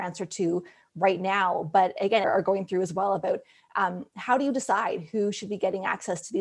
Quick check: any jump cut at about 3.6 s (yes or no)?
no